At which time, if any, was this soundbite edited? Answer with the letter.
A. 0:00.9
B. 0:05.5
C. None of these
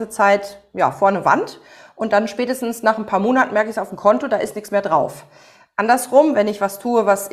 C